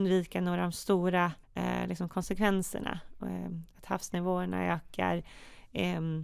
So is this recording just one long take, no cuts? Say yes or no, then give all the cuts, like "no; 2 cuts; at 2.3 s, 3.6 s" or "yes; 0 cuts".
no; 1 cut; at 1.4 s